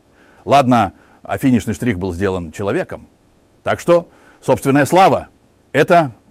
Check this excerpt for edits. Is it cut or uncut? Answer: uncut